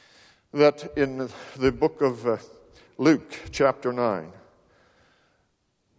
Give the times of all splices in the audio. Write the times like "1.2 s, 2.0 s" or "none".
none